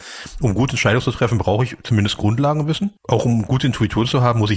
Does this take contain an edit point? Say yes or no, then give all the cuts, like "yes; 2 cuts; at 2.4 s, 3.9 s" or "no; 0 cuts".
yes; 1 cut; at 3.0 s